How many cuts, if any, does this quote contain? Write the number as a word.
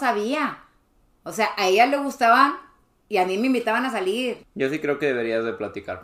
one